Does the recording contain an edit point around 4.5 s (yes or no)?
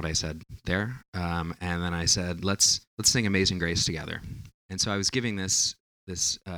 yes